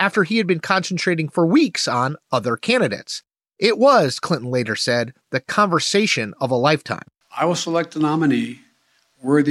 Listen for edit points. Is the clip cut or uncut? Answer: cut